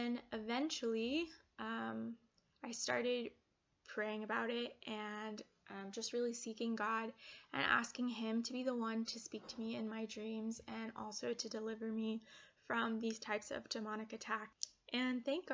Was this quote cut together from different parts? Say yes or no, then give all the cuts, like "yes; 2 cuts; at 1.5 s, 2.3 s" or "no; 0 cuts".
no; 0 cuts